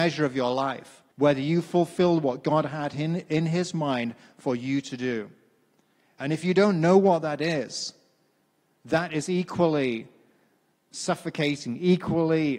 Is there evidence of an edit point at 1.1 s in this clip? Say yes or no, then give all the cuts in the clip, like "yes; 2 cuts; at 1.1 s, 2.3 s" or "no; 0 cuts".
yes; 1 cut; at 1.1 s